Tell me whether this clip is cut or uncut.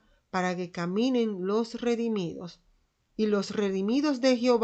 uncut